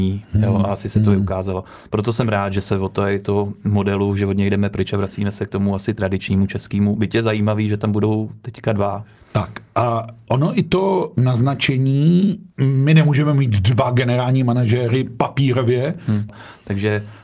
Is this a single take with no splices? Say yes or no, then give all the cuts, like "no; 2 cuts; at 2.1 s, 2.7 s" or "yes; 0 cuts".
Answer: no; 3 cuts; at 10.3 s, 12.5 s, 16.3 s